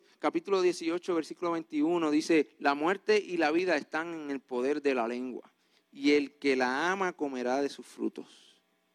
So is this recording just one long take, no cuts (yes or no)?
yes